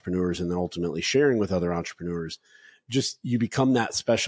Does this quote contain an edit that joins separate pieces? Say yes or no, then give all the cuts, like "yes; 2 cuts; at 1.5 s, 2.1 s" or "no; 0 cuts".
no; 0 cuts